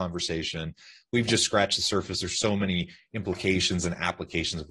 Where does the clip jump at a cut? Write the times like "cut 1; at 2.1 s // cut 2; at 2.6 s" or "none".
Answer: none